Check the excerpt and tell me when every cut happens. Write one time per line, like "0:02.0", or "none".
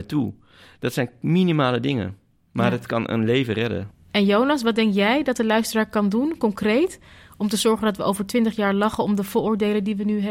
0:03.9